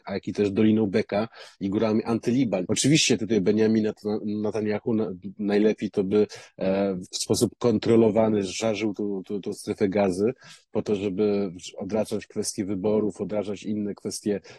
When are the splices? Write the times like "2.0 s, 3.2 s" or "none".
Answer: 2.7 s, 7.1 s